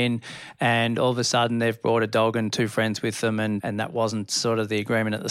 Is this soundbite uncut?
no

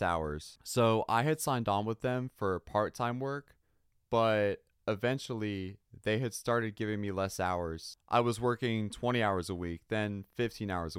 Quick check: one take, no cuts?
yes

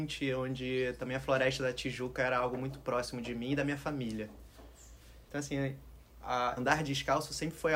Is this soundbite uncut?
no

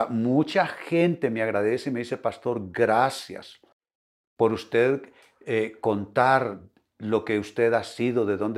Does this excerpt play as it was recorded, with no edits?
yes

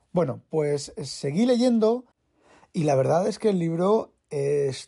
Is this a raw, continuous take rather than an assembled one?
yes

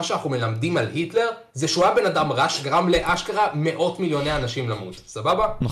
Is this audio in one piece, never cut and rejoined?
yes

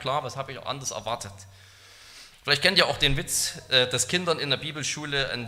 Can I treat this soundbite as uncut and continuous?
yes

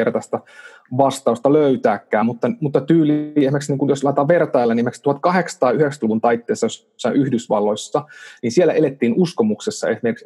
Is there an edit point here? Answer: no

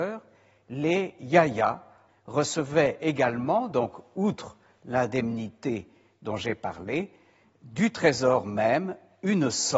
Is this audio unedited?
no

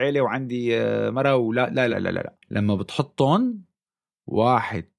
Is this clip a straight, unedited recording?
no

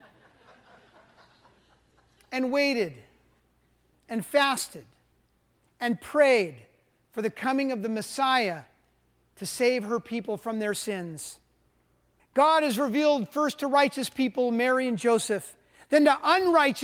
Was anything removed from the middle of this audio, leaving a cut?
yes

